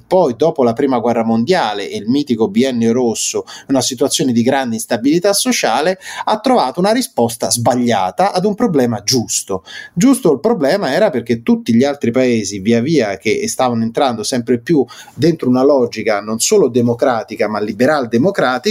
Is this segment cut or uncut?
uncut